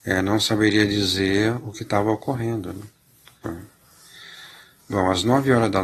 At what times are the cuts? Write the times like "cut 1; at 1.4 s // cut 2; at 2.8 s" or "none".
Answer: cut 1; at 3.4 s